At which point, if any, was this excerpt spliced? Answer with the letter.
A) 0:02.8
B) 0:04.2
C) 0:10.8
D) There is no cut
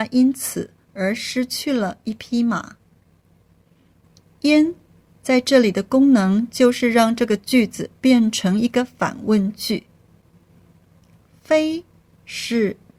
D